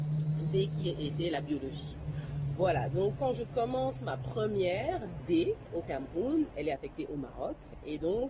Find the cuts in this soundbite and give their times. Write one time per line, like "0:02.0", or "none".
0:03.2
0:06.5